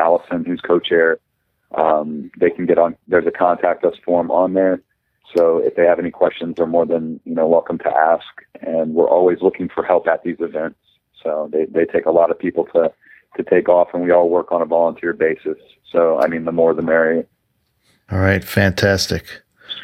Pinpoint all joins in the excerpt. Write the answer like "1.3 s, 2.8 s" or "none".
none